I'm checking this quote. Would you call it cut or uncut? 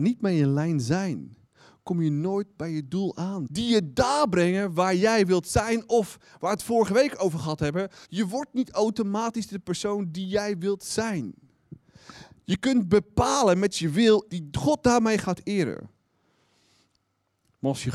cut